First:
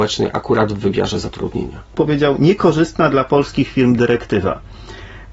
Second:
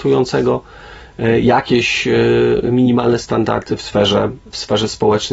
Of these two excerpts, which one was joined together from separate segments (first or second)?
first